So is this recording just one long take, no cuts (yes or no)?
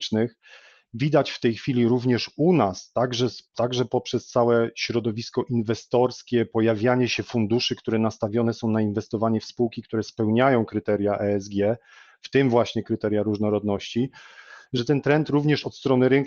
yes